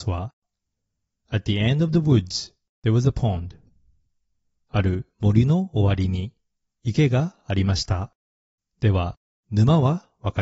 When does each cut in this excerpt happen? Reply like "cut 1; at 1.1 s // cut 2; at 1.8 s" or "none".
cut 1; at 8.6 s